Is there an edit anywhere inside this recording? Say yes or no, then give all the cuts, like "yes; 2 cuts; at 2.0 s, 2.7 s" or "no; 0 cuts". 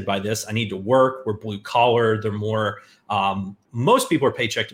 yes; 1 cut; at 3.6 s